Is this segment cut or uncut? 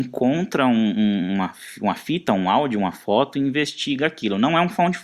uncut